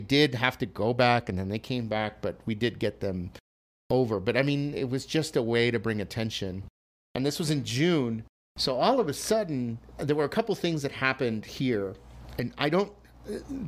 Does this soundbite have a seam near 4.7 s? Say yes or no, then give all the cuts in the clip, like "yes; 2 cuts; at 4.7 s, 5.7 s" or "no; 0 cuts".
no; 0 cuts